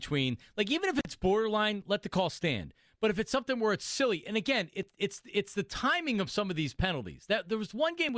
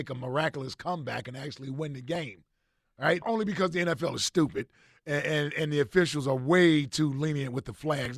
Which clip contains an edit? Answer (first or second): second